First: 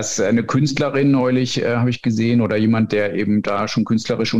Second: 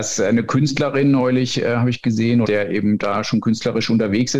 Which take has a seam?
second; 1 cut; at 2.4 s

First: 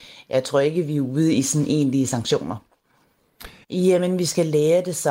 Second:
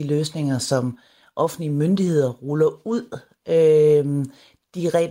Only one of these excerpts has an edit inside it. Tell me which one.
first; 1 cut; at 3.6 s

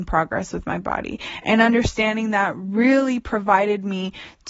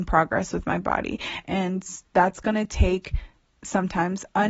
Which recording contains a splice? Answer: second; 1 cut; at 1.4 s

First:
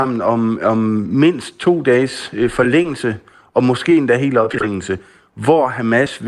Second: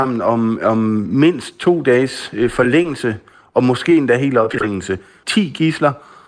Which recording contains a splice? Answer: second; 1 cut; at 5.2 s

